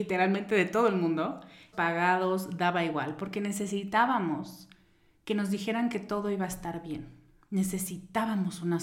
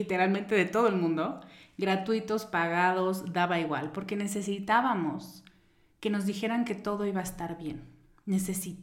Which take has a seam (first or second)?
first